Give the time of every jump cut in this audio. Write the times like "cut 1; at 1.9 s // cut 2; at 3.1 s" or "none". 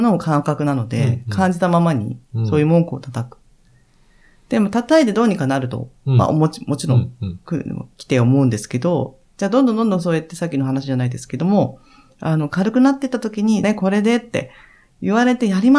cut 1; at 13.6 s